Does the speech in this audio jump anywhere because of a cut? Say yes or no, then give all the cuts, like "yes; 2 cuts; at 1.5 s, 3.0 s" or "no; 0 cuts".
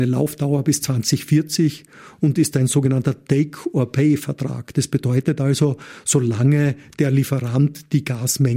no; 0 cuts